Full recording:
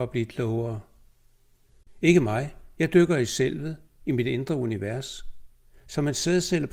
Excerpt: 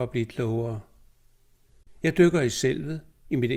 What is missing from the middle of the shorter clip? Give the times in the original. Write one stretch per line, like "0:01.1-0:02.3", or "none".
0:02.0-0:02.7